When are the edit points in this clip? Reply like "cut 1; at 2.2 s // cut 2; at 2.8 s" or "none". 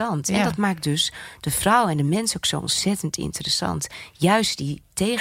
none